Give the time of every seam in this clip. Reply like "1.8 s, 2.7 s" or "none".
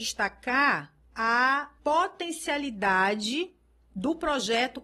1.8 s